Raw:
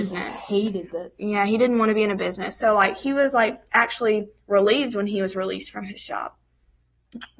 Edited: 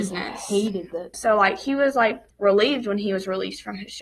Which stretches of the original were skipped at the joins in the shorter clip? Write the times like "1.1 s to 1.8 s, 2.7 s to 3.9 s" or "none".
1.1 s to 2.5 s, 3.7 s to 4.4 s